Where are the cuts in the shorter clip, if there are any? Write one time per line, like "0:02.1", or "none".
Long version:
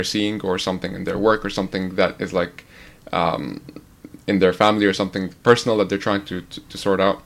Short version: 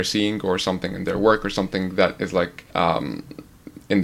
0:02.7